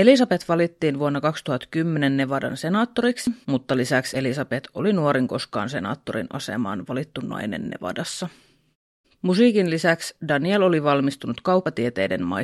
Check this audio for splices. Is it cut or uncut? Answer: cut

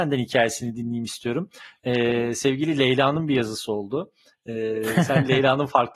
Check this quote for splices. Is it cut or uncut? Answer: uncut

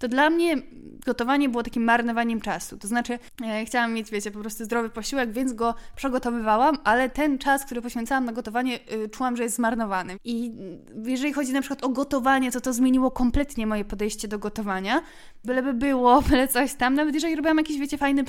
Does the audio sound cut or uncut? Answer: cut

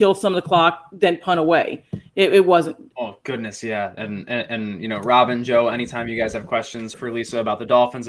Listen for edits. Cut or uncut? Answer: cut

